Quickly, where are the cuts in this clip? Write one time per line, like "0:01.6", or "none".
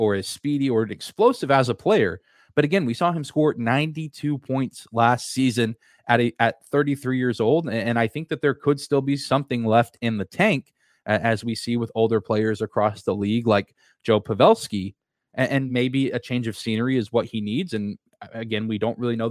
none